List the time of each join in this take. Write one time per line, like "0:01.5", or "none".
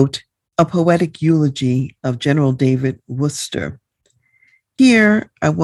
none